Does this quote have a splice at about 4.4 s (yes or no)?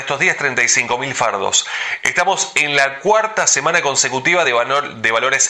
no